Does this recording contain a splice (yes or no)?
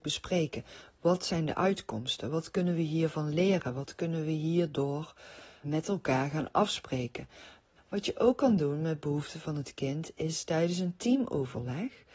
yes